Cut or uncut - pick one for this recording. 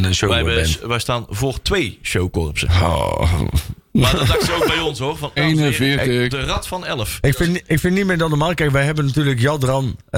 cut